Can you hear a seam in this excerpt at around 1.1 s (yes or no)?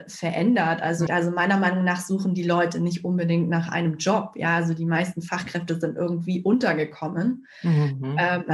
yes